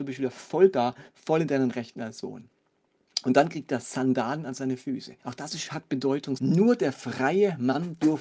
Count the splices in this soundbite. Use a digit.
2